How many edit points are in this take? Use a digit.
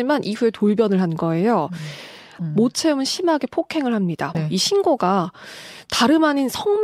2